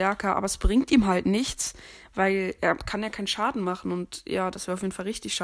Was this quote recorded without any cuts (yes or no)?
yes